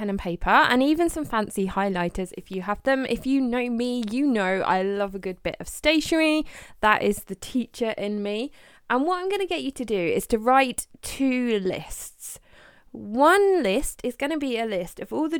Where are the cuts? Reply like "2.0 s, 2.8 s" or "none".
none